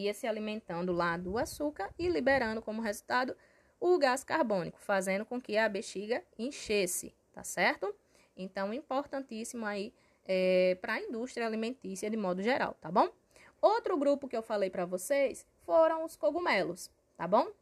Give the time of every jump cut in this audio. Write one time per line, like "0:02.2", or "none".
0:13.6